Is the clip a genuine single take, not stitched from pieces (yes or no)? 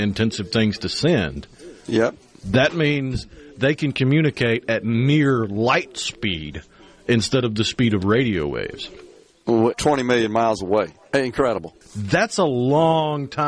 no